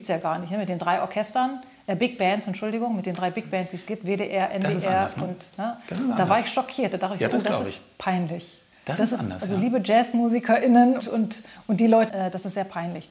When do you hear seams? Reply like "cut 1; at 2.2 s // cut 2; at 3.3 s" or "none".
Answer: cut 1; at 11.0 s // cut 2; at 12.1 s